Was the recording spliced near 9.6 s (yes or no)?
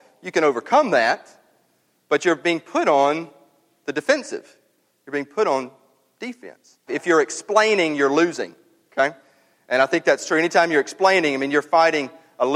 no